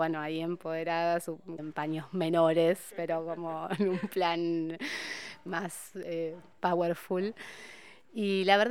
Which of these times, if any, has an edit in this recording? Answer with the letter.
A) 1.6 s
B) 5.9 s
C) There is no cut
A